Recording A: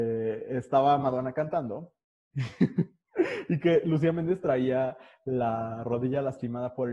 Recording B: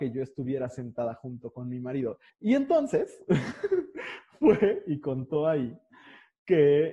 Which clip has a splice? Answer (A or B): B